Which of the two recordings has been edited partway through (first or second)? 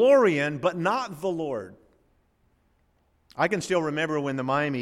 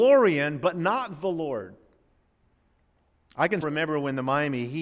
second